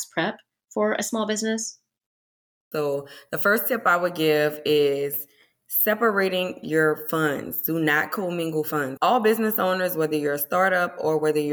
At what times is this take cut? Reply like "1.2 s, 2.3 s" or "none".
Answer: 2.7 s, 9.0 s